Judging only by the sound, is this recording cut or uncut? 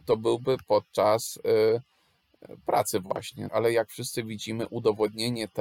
cut